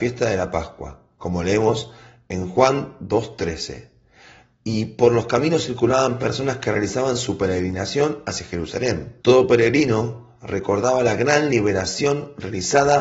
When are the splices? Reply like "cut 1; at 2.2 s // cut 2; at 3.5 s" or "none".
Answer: cut 1; at 9.2 s